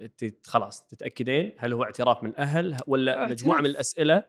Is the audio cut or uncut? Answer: uncut